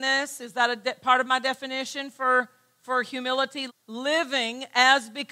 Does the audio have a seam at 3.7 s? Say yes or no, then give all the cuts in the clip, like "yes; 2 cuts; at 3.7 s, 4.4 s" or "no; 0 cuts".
yes; 1 cut; at 3.7 s